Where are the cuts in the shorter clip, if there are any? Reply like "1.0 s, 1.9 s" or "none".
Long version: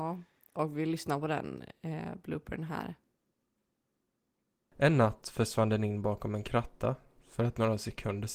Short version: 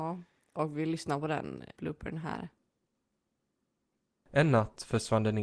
1.8 s